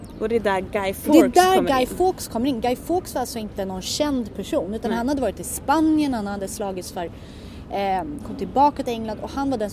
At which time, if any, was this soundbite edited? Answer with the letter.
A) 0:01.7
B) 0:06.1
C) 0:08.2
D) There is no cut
C